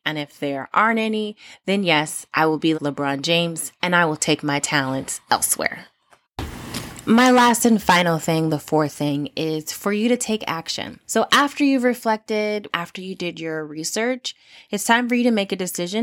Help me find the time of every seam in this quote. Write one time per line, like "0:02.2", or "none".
0:02.7
0:11.0
0:12.7